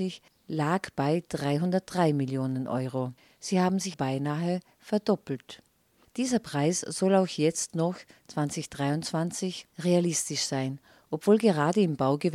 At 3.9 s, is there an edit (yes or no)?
yes